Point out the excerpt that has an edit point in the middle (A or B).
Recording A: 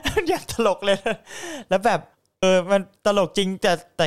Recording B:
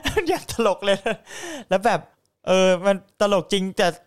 A